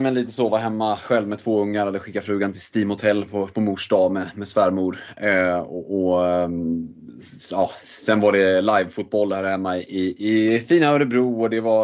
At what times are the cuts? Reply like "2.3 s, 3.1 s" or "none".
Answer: none